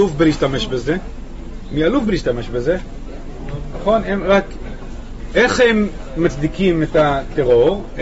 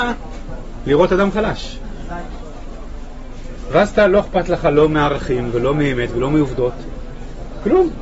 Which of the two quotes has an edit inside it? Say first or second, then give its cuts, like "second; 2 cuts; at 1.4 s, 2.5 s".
first; 1 cut; at 3.7 s